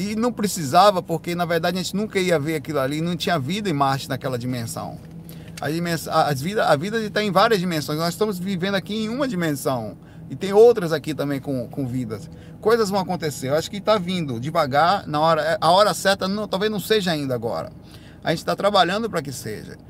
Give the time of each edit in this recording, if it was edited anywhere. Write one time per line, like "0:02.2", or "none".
none